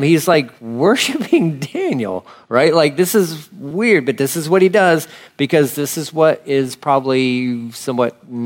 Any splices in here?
no; 0 cuts

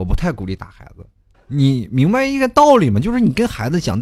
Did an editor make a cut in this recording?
yes; 1 cut; at 1.3 s

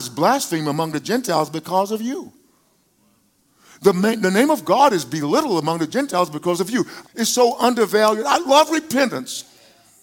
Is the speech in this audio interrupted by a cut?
yes; 1 cut; at 7.0 s

